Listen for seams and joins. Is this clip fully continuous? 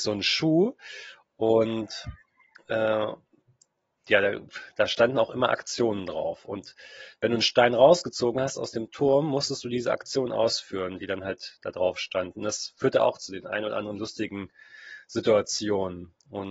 yes; 0 cuts

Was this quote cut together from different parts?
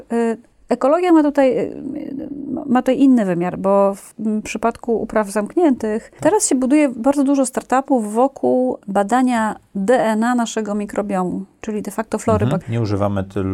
yes; 2 cuts; at 6.2 s, 12.6 s

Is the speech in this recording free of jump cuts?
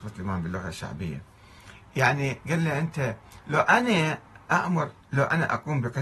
no; 1 cut; at 5.0 s

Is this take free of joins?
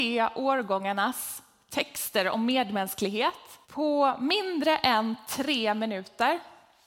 no; 1 cut; at 3.6 s

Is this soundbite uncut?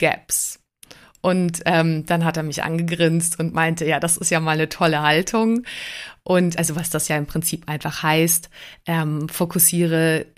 yes; 0 cuts

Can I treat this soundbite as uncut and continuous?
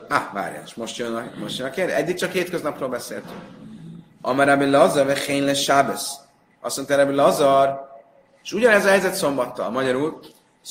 yes; 0 cuts

